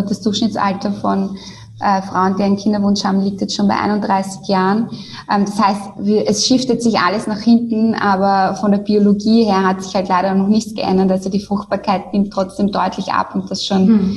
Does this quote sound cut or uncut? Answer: uncut